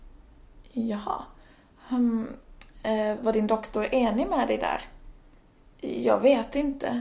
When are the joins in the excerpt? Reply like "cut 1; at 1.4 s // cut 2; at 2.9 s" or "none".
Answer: cut 1; at 3.2 s